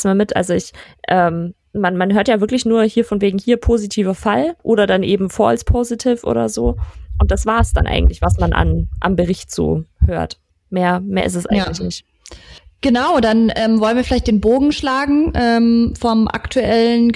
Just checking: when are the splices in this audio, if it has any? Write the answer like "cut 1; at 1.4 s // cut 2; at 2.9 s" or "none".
cut 1; at 4.6 s